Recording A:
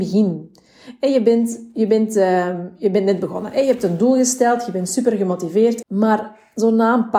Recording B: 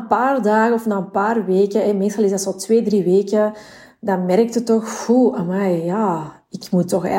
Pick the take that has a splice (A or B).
A